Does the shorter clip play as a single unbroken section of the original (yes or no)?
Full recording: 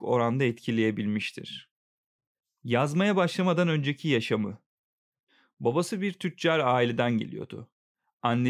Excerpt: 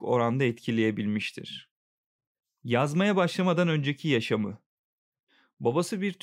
yes